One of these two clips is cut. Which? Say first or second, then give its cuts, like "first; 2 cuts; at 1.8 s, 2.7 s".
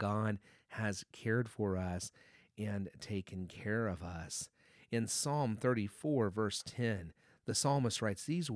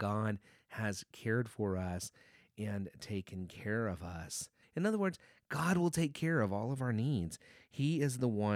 second; 1 cut; at 4.6 s